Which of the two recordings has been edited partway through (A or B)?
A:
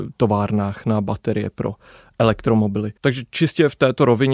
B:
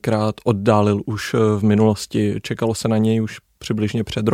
A